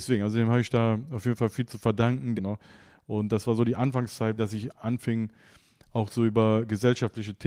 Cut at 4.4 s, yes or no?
yes